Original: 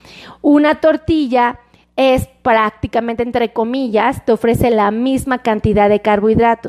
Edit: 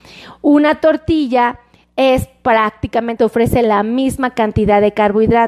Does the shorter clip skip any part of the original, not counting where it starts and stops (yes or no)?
yes